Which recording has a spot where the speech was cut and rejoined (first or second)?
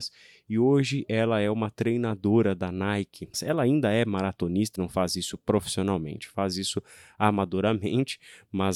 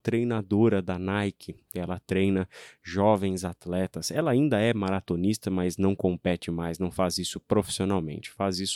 first